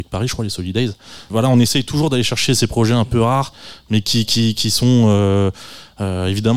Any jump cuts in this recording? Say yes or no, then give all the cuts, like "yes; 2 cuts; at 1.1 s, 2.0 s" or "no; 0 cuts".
yes; 1 cut; at 1.3 s